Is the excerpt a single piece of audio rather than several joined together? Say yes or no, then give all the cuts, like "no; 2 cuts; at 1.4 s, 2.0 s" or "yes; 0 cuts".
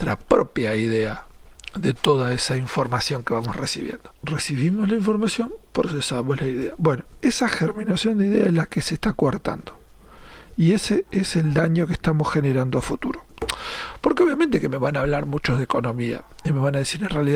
yes; 0 cuts